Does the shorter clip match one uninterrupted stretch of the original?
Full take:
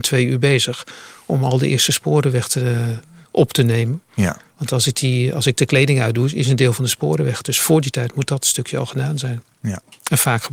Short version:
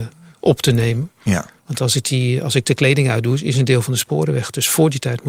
yes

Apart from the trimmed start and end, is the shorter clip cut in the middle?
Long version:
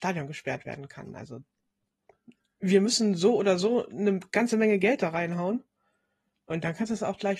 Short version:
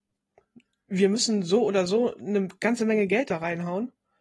no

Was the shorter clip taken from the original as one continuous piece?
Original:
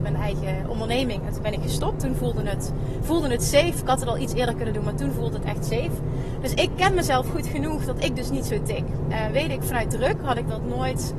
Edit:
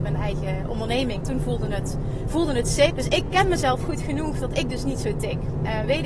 no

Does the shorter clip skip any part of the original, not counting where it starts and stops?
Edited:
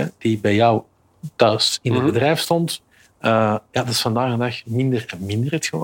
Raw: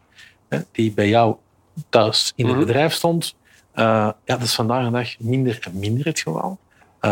no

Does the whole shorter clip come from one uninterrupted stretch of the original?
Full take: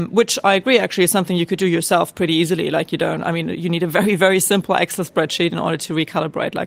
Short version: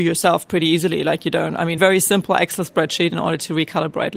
no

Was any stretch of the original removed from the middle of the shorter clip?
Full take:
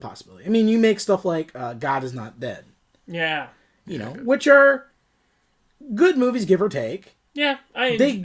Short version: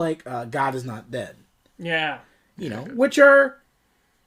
no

